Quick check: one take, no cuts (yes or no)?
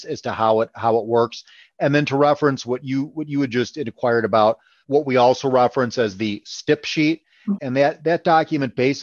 no